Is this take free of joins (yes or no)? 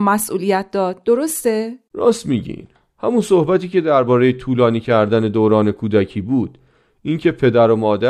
yes